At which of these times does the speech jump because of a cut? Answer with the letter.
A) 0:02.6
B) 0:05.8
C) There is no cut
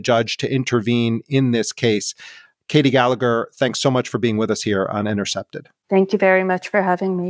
C